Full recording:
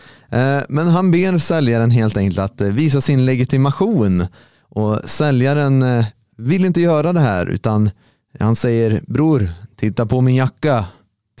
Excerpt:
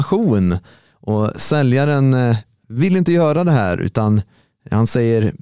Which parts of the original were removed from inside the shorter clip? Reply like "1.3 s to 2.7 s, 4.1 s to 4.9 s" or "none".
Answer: none